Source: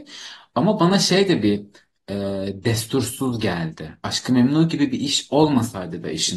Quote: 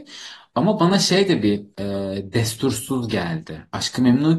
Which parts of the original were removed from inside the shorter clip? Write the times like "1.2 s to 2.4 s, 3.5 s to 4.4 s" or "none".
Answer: 1.7 s to 2.0 s